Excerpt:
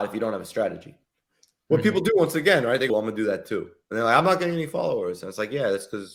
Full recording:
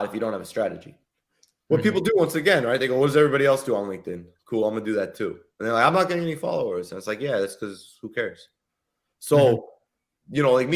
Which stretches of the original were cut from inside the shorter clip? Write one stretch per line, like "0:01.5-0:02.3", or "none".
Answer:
0:02.9-0:04.6